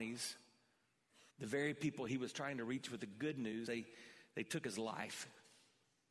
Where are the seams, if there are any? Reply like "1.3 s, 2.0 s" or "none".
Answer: 1.3 s, 3.7 s